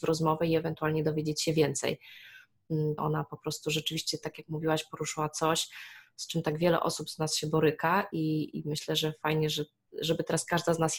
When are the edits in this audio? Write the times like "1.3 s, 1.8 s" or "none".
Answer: 3.0 s